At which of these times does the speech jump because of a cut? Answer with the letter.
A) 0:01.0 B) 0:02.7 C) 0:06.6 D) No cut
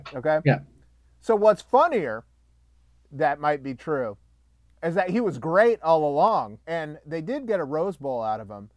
C